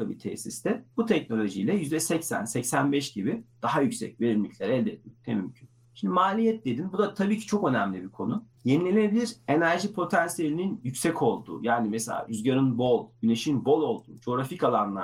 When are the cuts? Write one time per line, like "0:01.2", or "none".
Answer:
0:00.9
0:08.5